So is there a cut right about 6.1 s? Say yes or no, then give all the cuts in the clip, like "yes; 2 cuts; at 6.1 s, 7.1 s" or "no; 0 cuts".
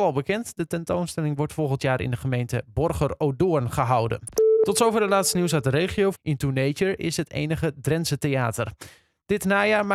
yes; 1 cut; at 6.1 s